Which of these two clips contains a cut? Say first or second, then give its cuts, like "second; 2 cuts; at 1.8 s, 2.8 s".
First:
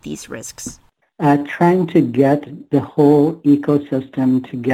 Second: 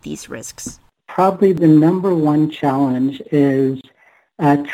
first; 1 cut; at 1.0 s